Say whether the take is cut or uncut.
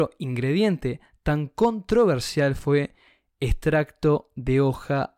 uncut